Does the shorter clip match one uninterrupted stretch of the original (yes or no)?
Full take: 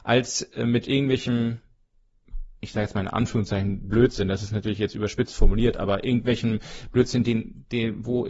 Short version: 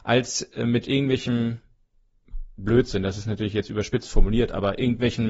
no